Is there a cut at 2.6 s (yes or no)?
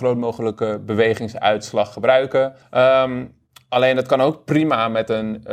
yes